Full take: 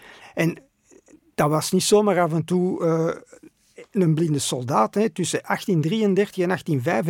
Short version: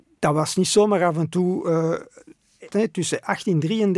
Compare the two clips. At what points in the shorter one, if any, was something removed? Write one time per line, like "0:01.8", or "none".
0:02.7